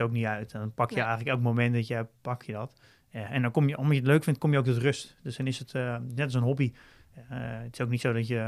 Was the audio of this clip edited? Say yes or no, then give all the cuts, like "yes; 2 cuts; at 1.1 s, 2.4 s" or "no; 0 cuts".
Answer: no; 0 cuts